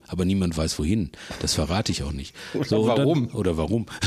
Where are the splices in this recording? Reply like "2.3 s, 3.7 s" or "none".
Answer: none